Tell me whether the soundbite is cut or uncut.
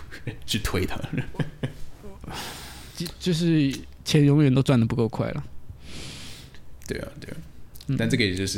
uncut